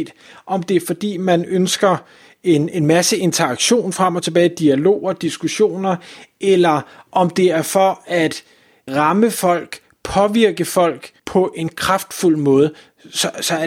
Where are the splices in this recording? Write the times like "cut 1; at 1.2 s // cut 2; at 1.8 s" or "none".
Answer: cut 1; at 8.9 s // cut 2; at 11.2 s